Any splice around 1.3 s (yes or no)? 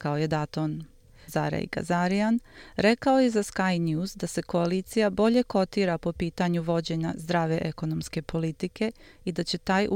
yes